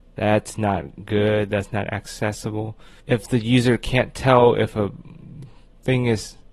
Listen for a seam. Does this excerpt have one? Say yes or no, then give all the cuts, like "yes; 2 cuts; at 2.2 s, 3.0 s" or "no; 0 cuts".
yes; 1 cut; at 3.0 s